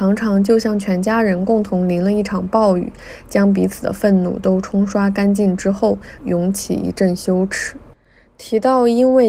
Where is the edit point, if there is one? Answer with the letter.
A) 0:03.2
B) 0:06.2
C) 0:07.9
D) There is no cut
B